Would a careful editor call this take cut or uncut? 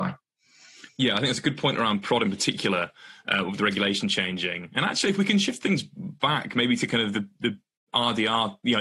uncut